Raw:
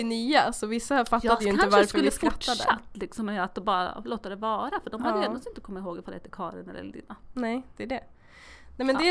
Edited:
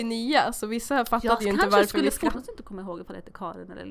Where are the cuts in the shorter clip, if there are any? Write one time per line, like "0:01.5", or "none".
0:02.3